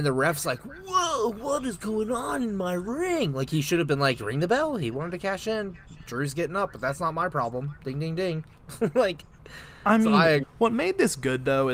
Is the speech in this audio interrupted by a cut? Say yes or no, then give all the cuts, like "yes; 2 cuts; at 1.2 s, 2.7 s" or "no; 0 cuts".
yes; 2 cuts; at 8.5 s, 10.4 s